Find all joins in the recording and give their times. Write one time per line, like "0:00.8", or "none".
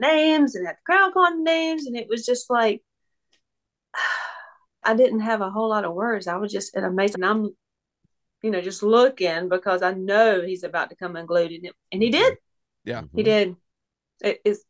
0:04.8
0:07.1